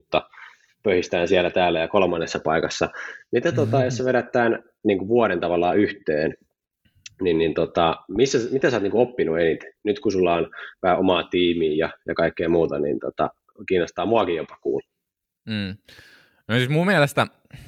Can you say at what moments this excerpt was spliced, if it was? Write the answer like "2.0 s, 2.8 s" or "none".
none